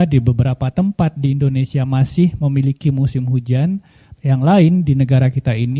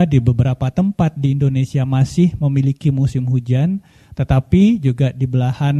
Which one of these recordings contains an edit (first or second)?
first